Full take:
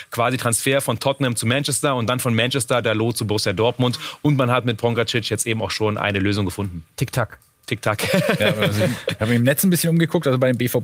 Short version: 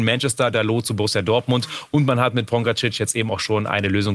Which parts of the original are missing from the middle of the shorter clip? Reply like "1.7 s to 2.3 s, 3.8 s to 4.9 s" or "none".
none